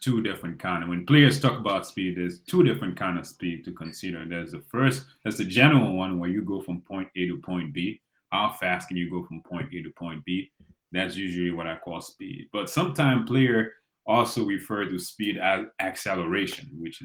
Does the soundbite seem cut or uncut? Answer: uncut